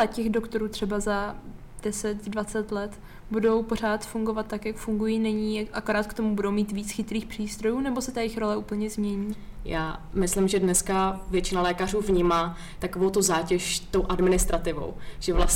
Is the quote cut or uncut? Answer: cut